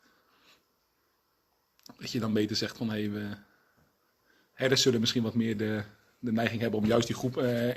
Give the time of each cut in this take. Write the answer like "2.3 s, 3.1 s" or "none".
none